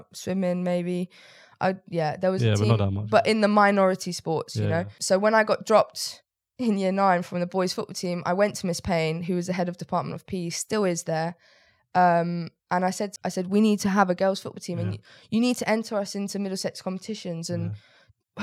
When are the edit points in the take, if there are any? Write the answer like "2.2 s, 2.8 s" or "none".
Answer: 13.2 s